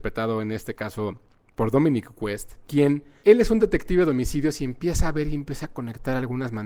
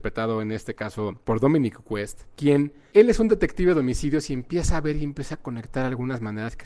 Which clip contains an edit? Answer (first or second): second